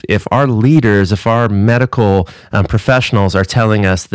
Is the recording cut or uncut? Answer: uncut